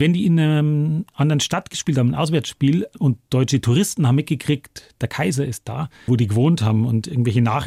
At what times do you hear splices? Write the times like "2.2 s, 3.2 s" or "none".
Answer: 6.1 s